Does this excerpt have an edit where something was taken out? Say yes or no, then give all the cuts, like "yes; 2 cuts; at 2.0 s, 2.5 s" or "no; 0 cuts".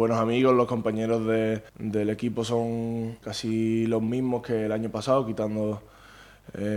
yes; 2 cuts; at 1.7 s, 3.2 s